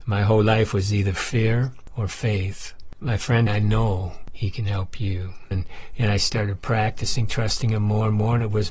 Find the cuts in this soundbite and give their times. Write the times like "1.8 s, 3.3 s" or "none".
3.5 s, 5.5 s